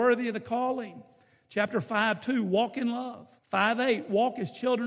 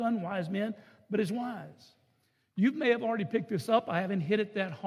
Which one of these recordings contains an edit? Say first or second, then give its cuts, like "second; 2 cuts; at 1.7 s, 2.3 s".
first; 1 cut; at 3.4 s